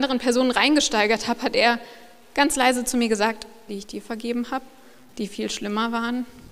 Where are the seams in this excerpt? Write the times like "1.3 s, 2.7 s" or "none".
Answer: 3.7 s